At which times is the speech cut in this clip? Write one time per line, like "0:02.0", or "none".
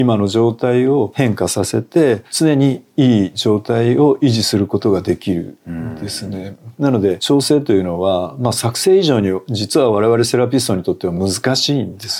none